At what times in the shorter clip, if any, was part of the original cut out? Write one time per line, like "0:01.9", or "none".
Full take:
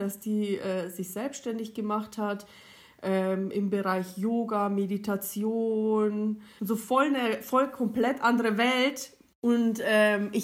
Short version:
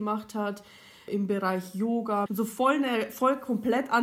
0:01.1
0:02.3